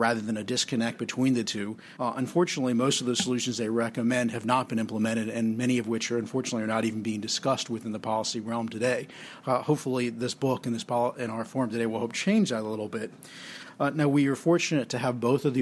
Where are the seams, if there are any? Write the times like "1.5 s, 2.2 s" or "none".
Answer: 2.0 s